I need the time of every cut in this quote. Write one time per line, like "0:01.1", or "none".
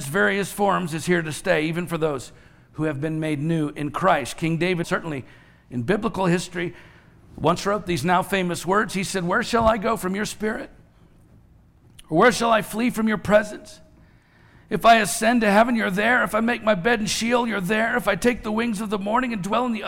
0:04.8

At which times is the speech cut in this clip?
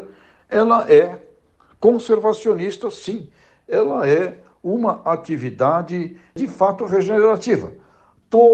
none

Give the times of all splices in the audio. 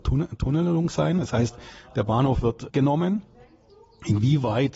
0:02.7

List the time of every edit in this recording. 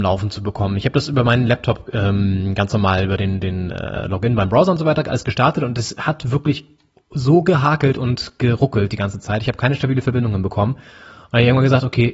none

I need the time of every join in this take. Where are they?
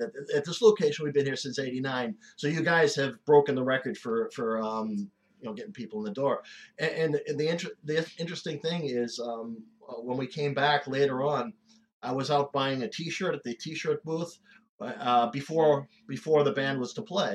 0:05.3

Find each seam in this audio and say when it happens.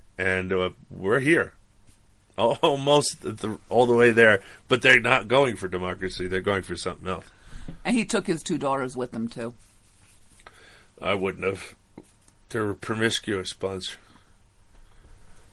none

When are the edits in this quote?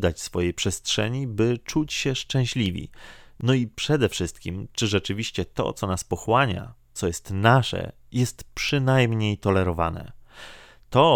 none

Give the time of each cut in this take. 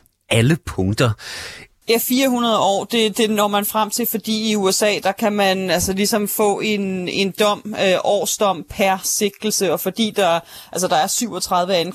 0:01.8

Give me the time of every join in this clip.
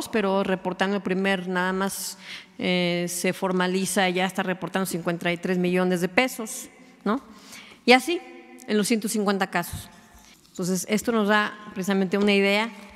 0:10.3

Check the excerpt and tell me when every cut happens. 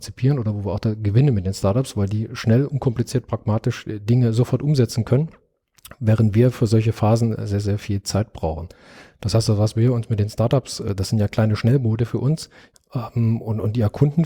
0:12.7

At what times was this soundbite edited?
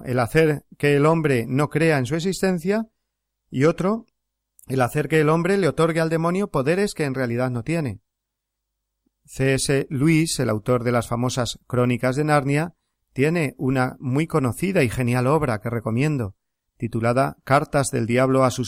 none

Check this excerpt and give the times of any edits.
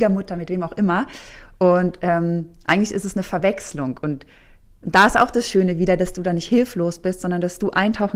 none

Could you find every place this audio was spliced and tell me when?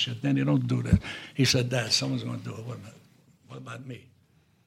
none

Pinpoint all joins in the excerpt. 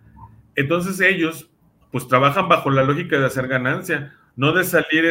none

